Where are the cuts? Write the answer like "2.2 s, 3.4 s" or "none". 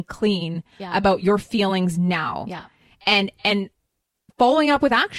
none